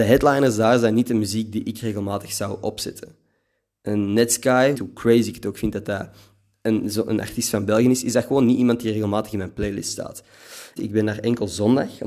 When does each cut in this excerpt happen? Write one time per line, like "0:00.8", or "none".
0:04.7
0:10.8